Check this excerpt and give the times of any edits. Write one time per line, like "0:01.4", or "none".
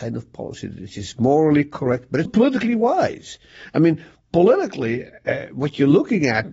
0:02.3